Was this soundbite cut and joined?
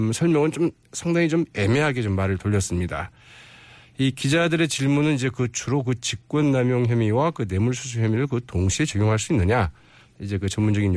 no; 0 cuts

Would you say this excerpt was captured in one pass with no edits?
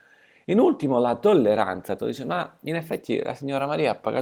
no; 1 cut; at 2.0 s

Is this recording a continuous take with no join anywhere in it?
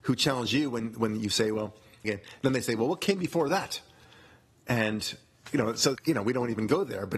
no; 2 cuts; at 2.0 s, 6.0 s

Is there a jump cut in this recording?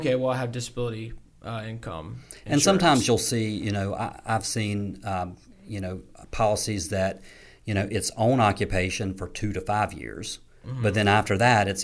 no; 0 cuts

